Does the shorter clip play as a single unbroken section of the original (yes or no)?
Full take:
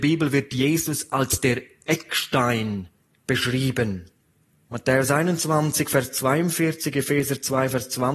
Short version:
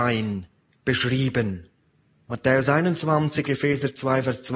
no